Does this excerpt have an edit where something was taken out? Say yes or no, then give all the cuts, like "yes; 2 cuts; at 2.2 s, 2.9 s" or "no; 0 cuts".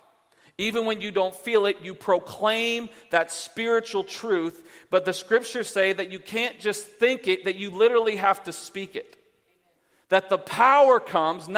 no; 0 cuts